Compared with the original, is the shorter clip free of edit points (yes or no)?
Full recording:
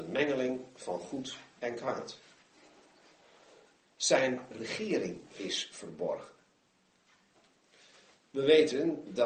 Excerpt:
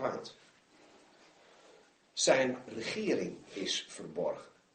yes